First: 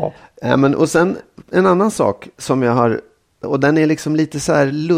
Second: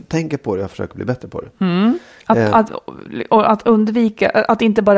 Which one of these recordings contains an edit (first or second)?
first